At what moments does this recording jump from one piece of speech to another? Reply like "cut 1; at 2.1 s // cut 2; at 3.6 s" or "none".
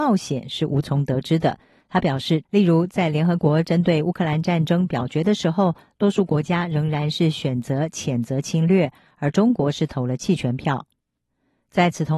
cut 1; at 2.4 s